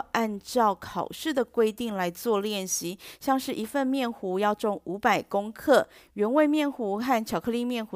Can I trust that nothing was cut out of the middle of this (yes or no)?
yes